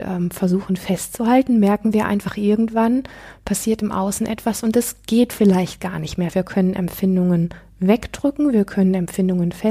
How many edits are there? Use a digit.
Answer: 1